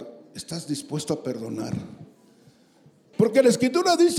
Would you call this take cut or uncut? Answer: cut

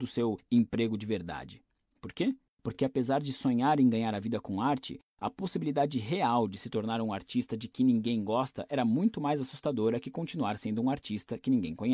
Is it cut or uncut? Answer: uncut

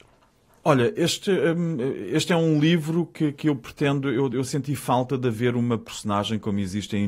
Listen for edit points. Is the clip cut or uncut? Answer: uncut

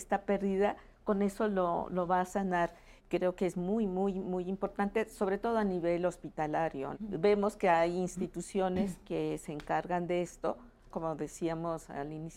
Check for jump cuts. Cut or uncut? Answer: cut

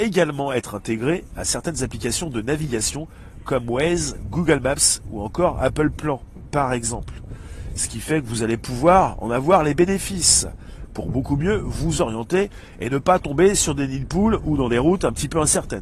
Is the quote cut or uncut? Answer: uncut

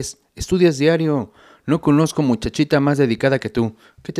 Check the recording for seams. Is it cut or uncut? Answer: uncut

